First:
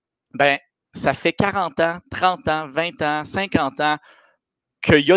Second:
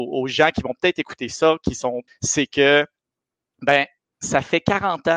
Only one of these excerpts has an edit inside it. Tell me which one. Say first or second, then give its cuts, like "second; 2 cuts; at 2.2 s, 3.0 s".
second; 1 cut; at 2.1 s